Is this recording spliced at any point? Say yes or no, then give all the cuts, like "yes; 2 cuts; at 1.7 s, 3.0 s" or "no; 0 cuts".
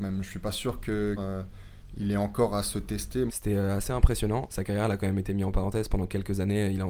yes; 3 cuts; at 1.2 s, 3.3 s, 4.5 s